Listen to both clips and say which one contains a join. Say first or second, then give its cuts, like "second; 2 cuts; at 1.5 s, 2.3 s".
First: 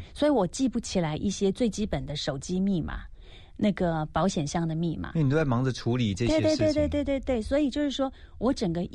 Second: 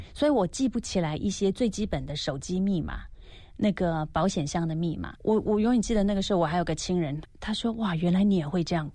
second; 2 cuts; at 5.1 s, 7.2 s